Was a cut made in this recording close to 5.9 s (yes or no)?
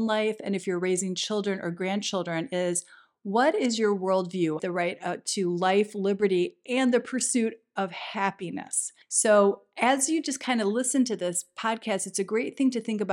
no